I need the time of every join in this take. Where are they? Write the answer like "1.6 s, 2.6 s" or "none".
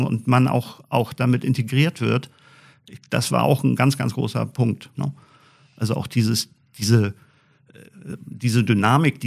4.9 s

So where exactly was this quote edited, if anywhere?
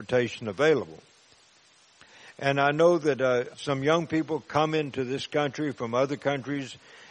2.3 s, 3.5 s

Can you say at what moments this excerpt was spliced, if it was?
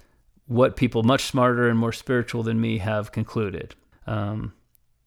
3.9 s

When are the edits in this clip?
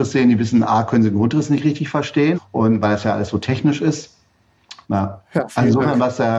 2.3 s, 4.8 s

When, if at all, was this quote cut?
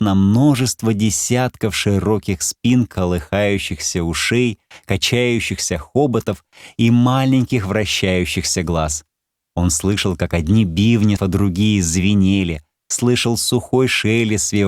11.2 s

